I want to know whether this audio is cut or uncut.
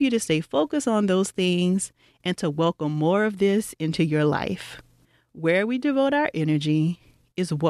uncut